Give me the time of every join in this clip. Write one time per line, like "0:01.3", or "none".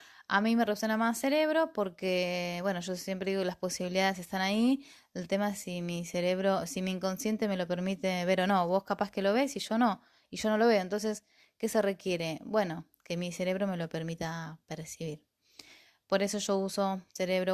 none